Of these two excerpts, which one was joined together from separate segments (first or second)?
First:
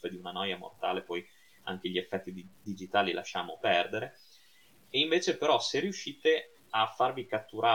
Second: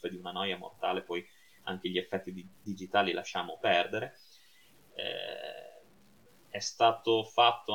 second